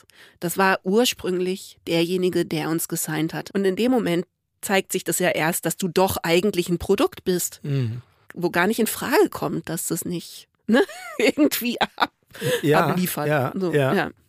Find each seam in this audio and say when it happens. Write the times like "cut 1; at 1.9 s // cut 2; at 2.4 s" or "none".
cut 1; at 3.5 s // cut 2; at 10.6 s